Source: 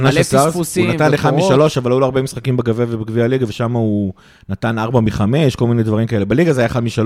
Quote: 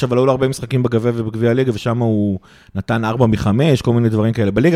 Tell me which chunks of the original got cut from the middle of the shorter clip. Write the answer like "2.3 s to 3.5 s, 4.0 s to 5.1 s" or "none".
none

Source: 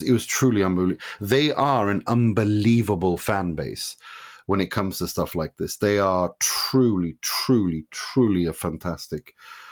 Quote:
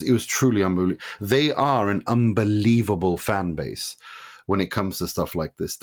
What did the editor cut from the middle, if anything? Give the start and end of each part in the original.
none

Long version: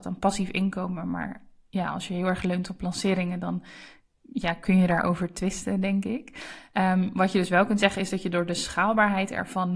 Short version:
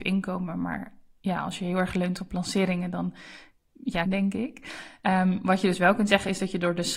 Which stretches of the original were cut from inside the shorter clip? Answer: 4.5 s to 5.8 s

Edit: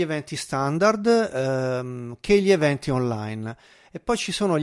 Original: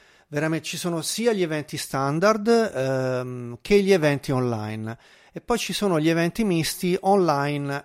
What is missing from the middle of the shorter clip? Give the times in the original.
none

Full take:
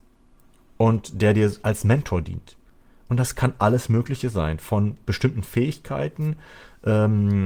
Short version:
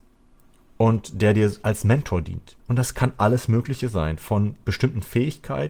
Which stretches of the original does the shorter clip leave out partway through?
2.6 s to 3.0 s

